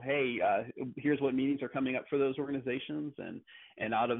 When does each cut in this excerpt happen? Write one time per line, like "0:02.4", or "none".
none